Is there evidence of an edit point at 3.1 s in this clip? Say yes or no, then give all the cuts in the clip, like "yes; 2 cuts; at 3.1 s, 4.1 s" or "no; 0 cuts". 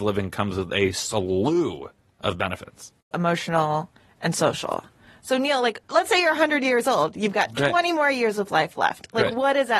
yes; 1 cut; at 3.1 s